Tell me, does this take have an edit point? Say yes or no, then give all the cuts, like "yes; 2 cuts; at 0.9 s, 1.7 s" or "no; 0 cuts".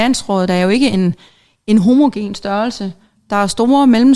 no; 0 cuts